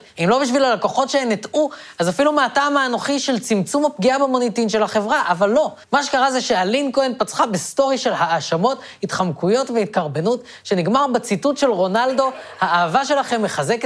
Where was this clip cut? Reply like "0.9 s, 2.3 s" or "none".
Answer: 5.8 s